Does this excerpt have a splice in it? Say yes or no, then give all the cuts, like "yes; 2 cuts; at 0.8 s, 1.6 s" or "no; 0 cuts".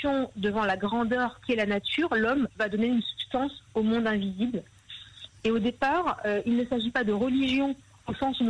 no; 0 cuts